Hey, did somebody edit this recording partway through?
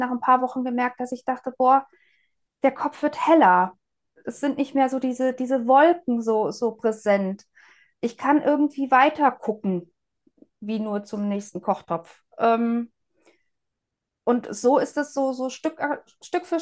no; 0 cuts

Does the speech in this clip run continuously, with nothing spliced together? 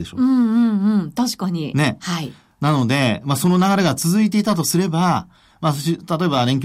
no; 1 cut; at 2.0 s

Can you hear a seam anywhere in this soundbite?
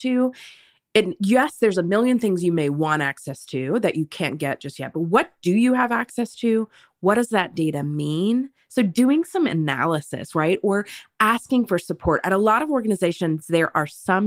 no; 0 cuts

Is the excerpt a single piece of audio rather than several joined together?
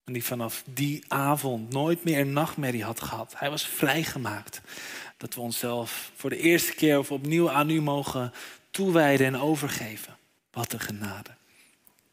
no; 2 cuts; at 5.1 s, 10.4 s

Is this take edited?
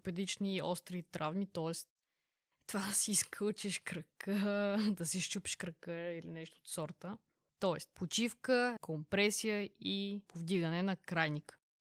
yes; 2 cuts; at 7.5 s, 8.8 s

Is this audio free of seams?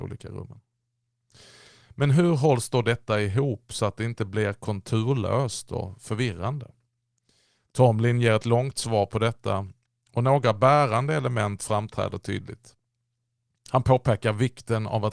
yes; 0 cuts

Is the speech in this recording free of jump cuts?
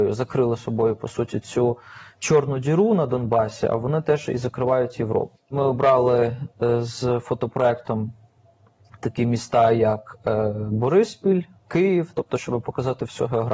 no; 1 cut; at 5.4 s

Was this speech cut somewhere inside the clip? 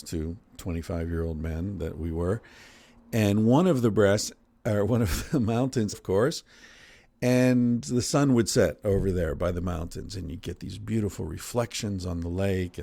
yes; 1 cut; at 5.9 s

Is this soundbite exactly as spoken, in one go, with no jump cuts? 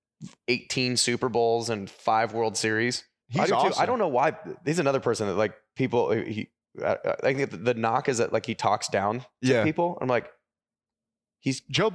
no; 1 cut; at 3.2 s

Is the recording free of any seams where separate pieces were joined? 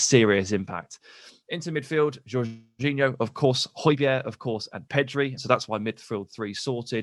no; 1 cut; at 5.4 s

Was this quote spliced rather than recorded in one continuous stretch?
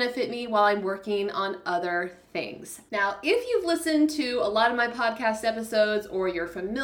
yes; 1 cut; at 2.9 s

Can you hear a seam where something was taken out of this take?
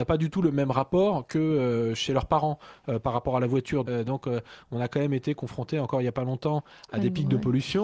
yes; 1 cut; at 3.9 s

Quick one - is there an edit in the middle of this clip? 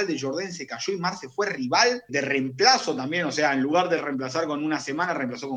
yes; 1 cut; at 2.1 s

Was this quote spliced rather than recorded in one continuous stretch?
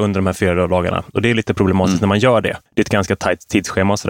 yes; 1 cut; at 2.7 s

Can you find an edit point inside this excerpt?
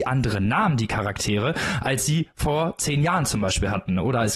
no; 0 cuts

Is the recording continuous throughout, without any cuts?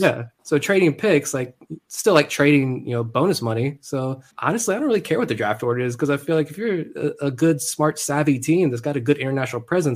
no; 1 cut; at 4.3 s

